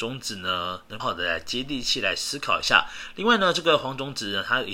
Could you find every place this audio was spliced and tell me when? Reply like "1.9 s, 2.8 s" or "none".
1.0 s